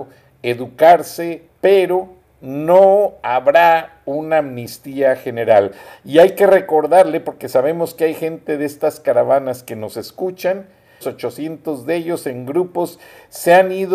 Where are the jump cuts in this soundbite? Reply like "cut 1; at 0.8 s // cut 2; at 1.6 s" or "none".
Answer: cut 1; at 1.5 s // cut 2; at 11.0 s